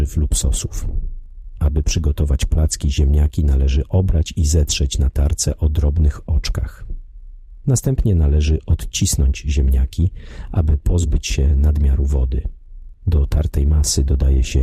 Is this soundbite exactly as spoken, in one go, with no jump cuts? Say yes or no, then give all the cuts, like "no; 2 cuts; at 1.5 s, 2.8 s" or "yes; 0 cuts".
yes; 0 cuts